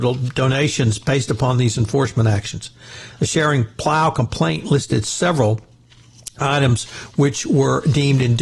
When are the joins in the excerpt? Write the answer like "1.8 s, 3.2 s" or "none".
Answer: none